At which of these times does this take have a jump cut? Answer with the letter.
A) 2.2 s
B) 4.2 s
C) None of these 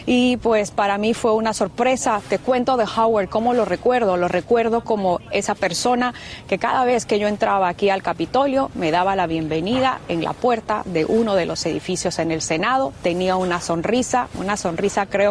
C